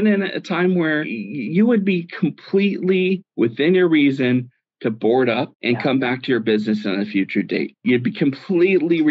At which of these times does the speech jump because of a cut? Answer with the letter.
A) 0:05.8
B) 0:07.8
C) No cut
C